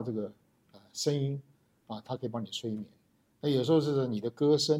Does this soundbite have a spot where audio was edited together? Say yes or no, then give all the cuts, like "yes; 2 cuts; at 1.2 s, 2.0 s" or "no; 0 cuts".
no; 0 cuts